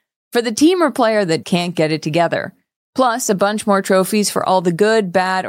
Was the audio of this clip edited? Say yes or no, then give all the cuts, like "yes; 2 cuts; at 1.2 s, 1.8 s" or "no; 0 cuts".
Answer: yes; 1 cut; at 1.4 s